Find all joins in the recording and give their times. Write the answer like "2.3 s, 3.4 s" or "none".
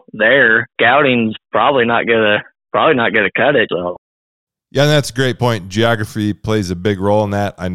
3.7 s

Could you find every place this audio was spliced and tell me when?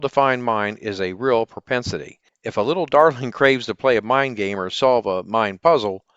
none

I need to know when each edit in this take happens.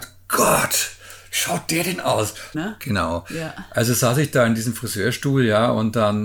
2.5 s

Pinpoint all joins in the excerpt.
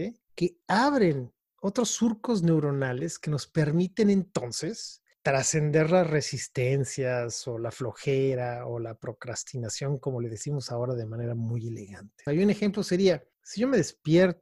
12.3 s

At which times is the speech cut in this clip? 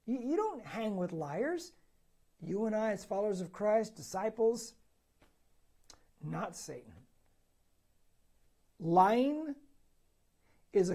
2.2 s, 6.1 s

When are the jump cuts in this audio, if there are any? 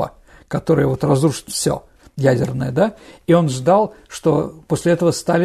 none

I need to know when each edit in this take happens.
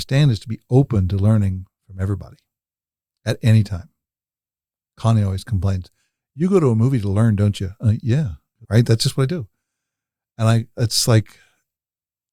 8.6 s

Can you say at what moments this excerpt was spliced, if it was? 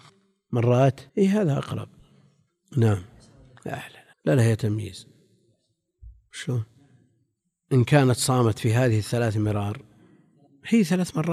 1.1 s, 4.1 s

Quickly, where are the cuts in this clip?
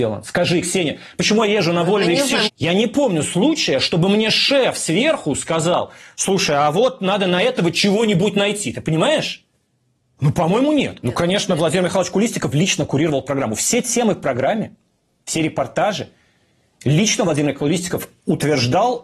2.5 s, 10.2 s, 15.2 s

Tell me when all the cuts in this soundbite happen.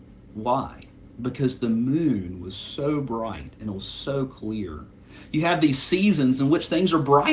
none

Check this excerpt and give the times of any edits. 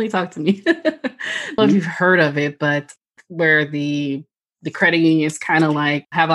1.6 s

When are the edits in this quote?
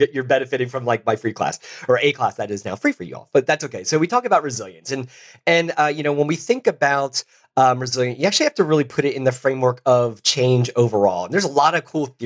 none

